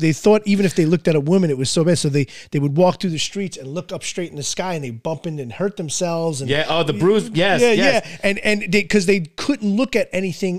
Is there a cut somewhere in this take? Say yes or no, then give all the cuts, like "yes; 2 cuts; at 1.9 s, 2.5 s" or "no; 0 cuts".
no; 0 cuts